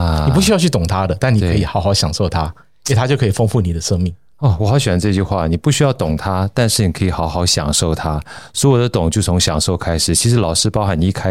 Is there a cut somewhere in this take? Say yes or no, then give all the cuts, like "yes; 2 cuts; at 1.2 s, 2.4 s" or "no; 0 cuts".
no; 0 cuts